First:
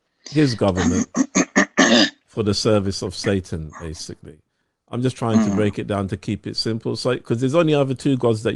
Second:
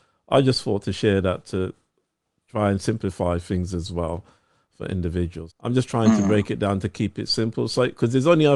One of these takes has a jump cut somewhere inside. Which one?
second; 1 cut; at 5.5 s

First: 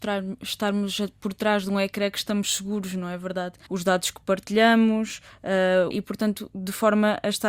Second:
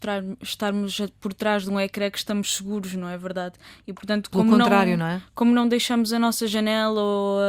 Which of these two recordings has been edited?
first; 2 cuts; at 3.7 s, 5.9 s

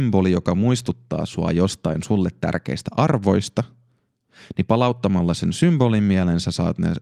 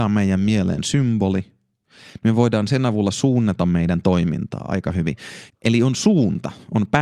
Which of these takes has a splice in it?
second; 1 cut; at 5.5 s

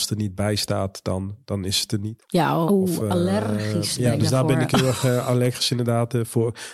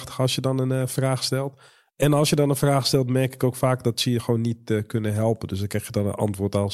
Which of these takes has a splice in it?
first; 1 cut; at 2.7 s

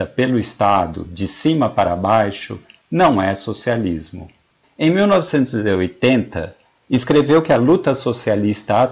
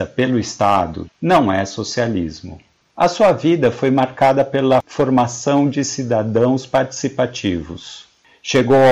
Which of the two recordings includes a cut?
second; 2 cuts; at 1.0 s, 2.9 s

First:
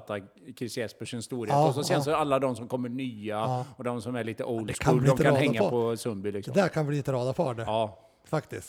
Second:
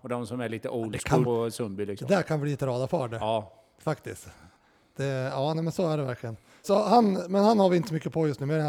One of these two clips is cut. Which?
second; 2 cuts; at 1.2 s, 6.6 s

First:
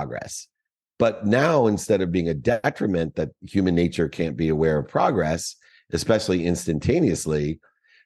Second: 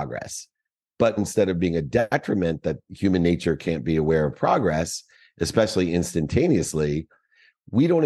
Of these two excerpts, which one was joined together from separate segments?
second; 1 cut; at 1.2 s

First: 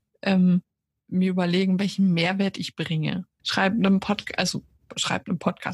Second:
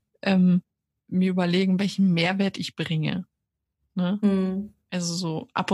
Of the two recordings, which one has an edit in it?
first; 1 cut; at 3.4 s

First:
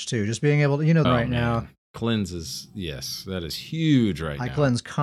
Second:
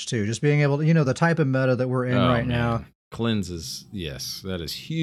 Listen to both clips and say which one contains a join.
first; 1 cut; at 1.1 s

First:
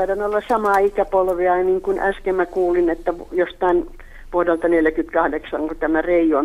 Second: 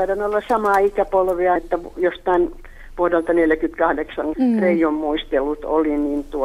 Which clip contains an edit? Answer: second; 2 cuts; at 1.6 s, 4.3 s

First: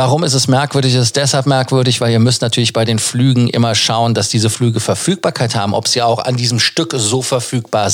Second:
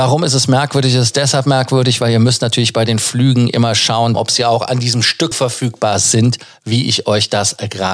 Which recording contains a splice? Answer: second; 2 cuts; at 4.1 s, 5.3 s

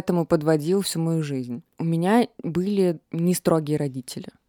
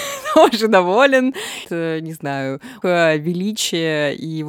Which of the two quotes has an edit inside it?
second; 2 cuts; at 1.6 s, 2.8 s

